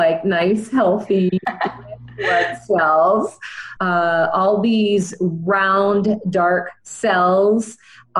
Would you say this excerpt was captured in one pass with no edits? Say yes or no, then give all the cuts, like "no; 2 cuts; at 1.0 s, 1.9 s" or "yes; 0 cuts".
no; 1 cut; at 3.8 s